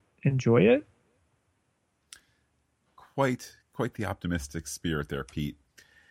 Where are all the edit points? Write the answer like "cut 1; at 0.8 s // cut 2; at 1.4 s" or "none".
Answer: none